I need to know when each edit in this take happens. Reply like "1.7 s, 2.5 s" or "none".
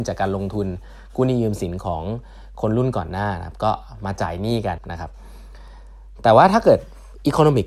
4.8 s